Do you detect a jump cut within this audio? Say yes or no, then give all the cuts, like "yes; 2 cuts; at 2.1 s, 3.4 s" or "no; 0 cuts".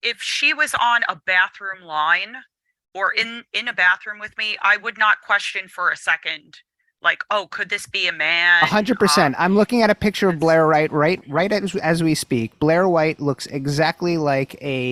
yes; 1 cut; at 11.2 s